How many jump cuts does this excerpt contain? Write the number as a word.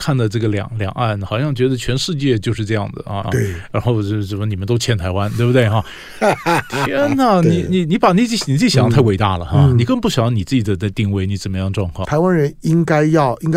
two